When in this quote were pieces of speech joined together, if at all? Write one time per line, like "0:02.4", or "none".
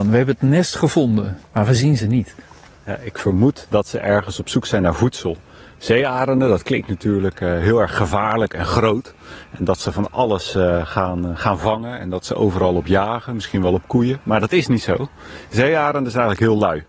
0:01.4

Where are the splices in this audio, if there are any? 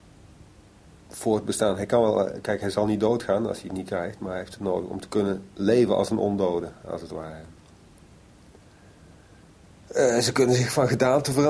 none

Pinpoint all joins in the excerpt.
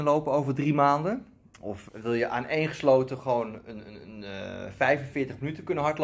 0:01.9

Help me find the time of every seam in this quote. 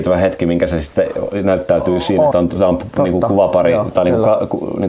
0:02.3

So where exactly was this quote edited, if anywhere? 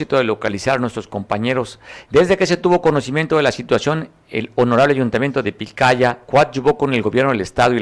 0:02.0

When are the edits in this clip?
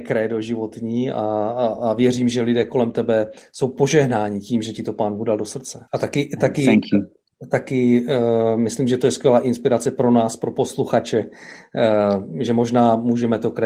0:05.9

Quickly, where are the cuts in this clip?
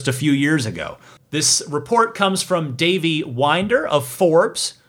0:01.2

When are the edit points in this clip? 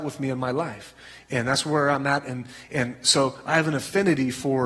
none

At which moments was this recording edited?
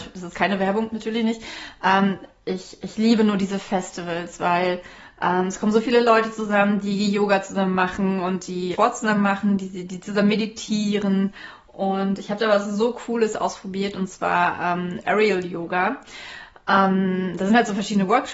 0:08.7

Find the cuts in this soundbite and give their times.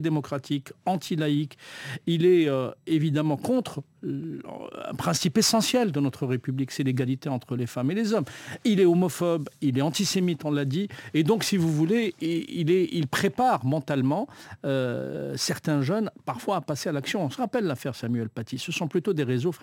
none

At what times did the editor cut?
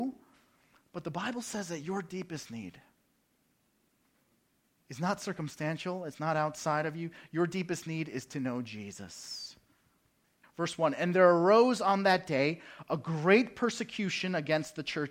0:10.4

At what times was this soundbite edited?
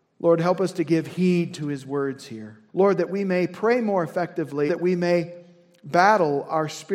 0:02.7
0:04.7

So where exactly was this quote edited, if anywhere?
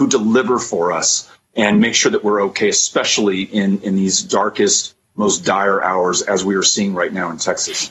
none

